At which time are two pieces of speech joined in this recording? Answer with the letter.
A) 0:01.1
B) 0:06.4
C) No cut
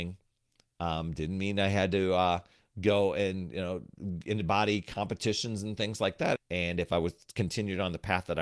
B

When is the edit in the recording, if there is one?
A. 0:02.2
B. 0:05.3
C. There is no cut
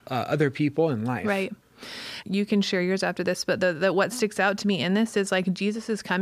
A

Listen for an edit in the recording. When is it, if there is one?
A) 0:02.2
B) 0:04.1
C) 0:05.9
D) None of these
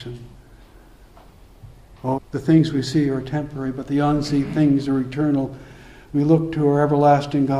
A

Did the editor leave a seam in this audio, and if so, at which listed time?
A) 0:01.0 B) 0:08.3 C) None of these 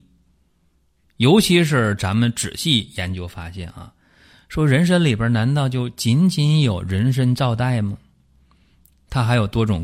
A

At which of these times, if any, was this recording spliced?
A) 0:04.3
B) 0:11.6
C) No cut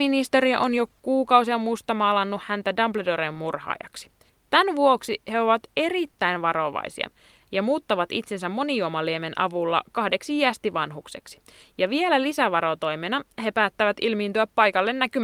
A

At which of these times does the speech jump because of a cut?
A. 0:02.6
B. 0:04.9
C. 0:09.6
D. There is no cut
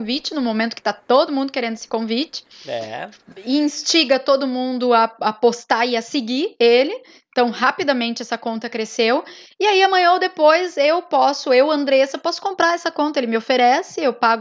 D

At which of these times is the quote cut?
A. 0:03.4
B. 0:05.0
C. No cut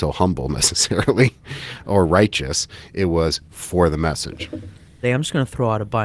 B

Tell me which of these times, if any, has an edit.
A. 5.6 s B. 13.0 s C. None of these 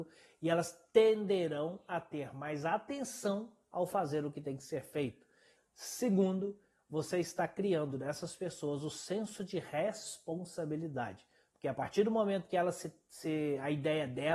A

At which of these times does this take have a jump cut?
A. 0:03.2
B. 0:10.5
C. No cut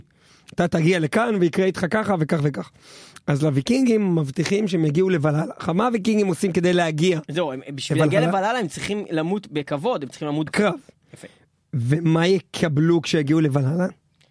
B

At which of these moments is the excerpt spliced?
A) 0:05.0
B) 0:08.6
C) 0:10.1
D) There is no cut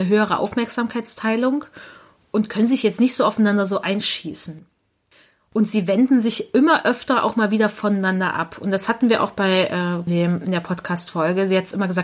C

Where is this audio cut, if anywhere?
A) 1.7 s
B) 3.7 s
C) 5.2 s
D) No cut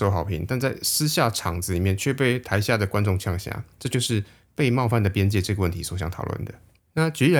B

